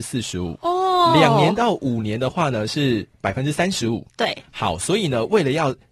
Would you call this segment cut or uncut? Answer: uncut